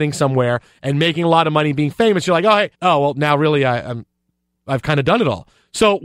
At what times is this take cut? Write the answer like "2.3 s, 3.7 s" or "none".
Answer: 2.7 s